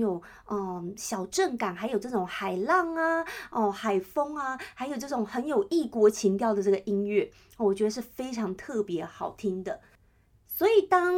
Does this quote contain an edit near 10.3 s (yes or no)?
no